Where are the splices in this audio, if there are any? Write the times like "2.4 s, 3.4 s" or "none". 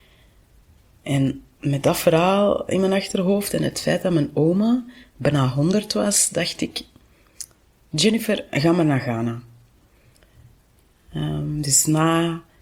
none